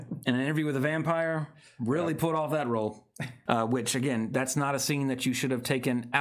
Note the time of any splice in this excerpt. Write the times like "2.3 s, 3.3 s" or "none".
3.5 s